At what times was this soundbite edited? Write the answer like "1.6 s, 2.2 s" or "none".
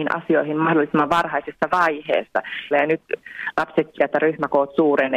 2.7 s, 4.0 s